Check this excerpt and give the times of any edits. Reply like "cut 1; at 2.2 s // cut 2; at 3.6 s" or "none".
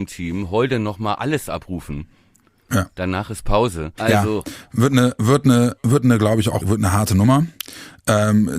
cut 1; at 4.0 s // cut 2; at 6.6 s